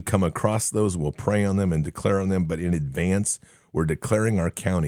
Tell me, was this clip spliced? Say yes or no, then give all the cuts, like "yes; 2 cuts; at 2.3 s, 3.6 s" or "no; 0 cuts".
no; 0 cuts